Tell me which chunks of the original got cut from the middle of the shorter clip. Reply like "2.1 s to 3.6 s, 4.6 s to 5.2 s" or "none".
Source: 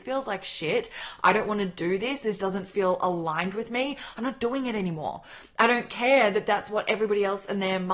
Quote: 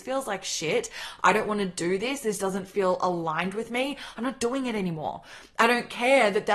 none